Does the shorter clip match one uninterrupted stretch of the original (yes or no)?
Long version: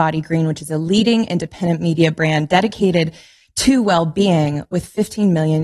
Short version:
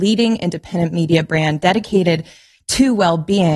yes